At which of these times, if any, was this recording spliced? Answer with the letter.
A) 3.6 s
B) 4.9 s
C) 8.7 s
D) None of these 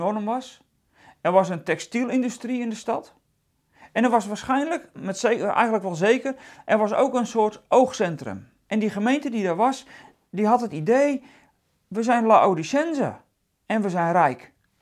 C